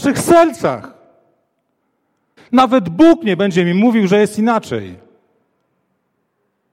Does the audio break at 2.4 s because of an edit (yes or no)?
yes